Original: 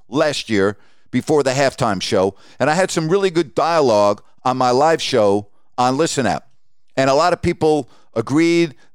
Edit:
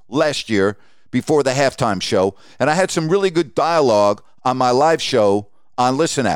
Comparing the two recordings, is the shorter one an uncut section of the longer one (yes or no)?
yes